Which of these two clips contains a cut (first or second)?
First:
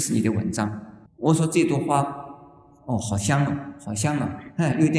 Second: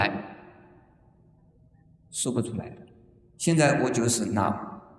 first